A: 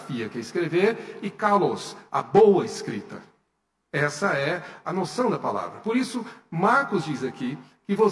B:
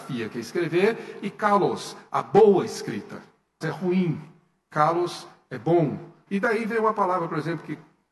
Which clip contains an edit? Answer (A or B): B